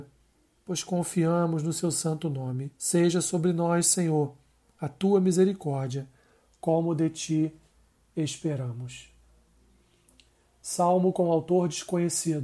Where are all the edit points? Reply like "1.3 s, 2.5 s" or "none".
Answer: 2.8 s